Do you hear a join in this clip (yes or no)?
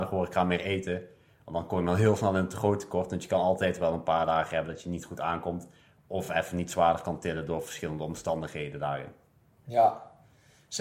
no